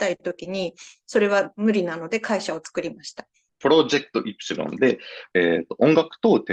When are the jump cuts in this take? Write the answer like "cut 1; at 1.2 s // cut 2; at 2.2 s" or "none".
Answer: cut 1; at 3.5 s // cut 2; at 5.3 s